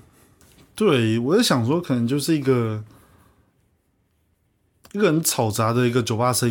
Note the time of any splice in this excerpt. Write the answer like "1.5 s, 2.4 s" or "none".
none

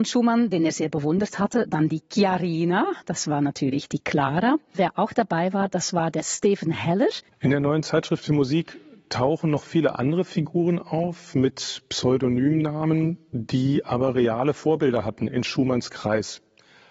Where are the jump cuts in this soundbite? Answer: 7.3 s

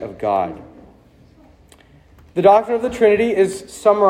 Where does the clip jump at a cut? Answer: none

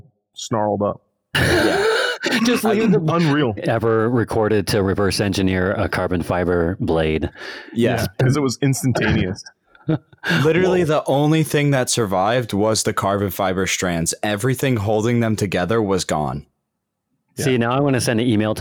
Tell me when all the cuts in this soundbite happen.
3.6 s

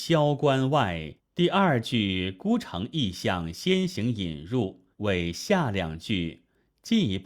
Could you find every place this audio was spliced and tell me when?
1.2 s, 4.9 s

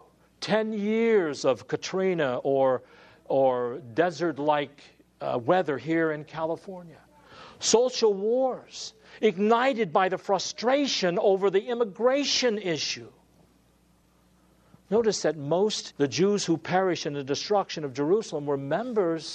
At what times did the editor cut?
15.9 s

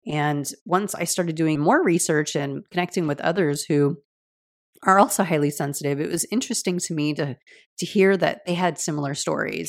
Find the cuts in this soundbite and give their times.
1.6 s

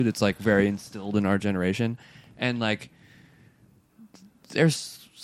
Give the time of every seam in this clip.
none

